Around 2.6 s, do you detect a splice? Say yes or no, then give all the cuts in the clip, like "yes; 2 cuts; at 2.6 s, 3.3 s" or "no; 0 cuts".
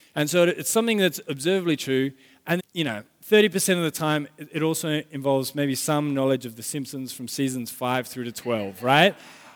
yes; 1 cut; at 2.6 s